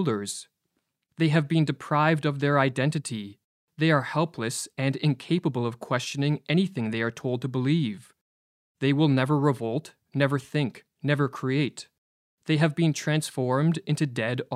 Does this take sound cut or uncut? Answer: uncut